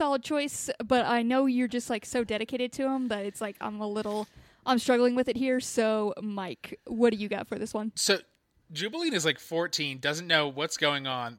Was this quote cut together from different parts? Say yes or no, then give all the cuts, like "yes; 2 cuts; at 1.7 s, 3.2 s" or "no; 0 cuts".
no; 0 cuts